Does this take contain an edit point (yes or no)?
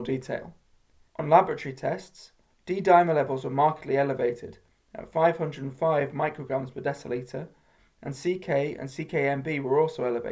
yes